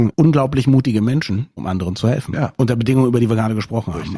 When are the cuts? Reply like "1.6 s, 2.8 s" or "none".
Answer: 1.6 s